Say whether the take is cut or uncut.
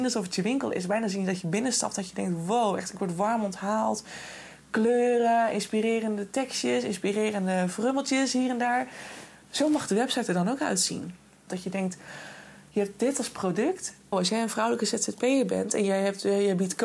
cut